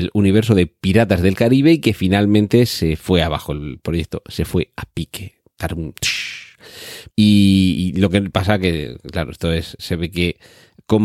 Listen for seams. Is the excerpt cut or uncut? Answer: cut